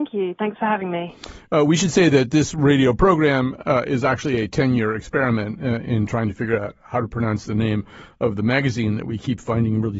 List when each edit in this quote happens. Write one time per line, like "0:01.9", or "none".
none